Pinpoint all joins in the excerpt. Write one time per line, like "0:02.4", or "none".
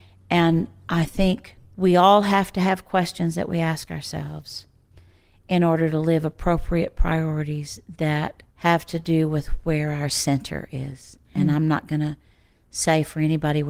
0:08.5